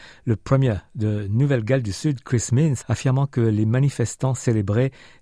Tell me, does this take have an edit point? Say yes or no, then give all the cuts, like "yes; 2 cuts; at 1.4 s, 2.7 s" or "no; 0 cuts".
yes; 1 cut; at 2.8 s